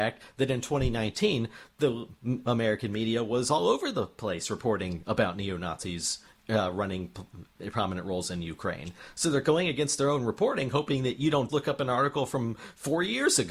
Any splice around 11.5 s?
yes; 1 cut; at 11.5 s

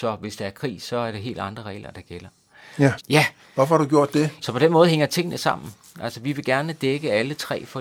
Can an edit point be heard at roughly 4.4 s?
yes; 2 cuts; at 3.0 s, 4.4 s

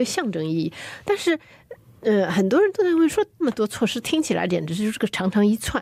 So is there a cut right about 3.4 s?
yes; 1 cut; at 3.4 s

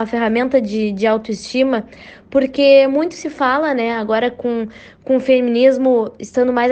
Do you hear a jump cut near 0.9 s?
no; 0 cuts

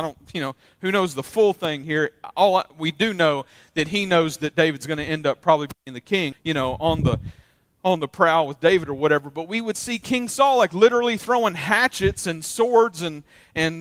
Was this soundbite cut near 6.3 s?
yes; 1 cut; at 6.3 s

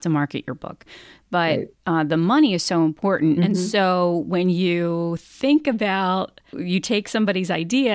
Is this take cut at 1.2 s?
yes; 3 cuts; at 1.2 s, 3.4 s, 6.5 s

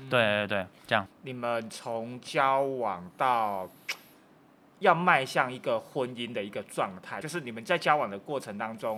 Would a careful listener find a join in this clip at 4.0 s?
no; 2 cuts; at 1.1 s, 7.2 s

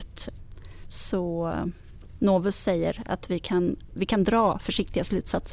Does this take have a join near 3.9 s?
yes; 1 cut; at 3.9 s

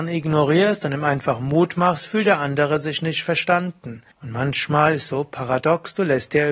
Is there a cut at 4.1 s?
yes; 1 cut; at 4.1 s

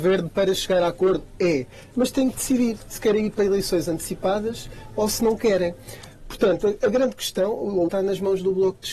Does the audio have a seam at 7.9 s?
yes; 1 cut; at 7.9 s

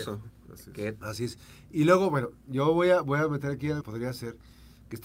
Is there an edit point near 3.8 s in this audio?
yes; 2 cuts; at 1.0 s, 3.8 s

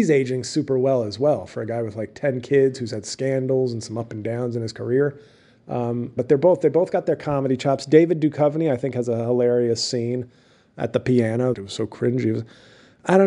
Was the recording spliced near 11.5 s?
yes; 2 cuts; at 6.2 s, 11.5 s

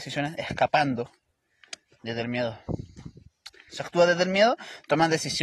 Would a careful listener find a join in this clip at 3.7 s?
yes; 1 cut; at 3.7 s

